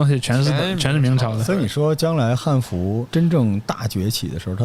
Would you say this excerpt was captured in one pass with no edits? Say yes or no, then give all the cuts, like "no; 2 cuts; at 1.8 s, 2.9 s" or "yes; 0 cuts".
yes; 0 cuts